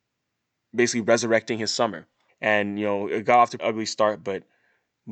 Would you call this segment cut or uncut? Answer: cut